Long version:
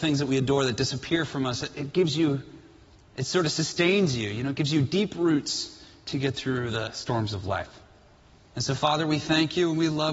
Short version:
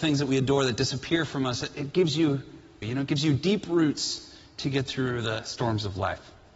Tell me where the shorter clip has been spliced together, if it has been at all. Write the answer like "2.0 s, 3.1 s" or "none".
2.8 s